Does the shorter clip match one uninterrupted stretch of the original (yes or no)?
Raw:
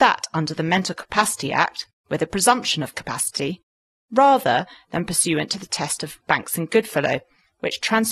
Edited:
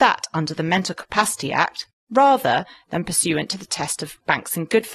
no